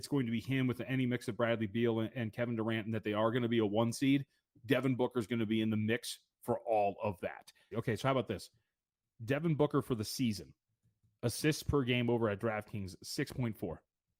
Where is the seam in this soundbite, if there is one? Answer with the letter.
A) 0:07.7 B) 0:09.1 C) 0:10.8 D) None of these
A